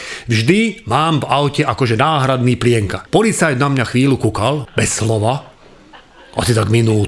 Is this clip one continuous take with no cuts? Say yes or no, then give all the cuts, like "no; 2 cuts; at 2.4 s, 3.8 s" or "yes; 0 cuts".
no; 2 cuts; at 3.1 s, 4.7 s